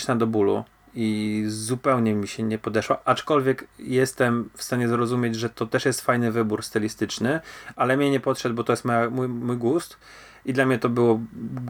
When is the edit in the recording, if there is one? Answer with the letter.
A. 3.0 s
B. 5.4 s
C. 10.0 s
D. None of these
D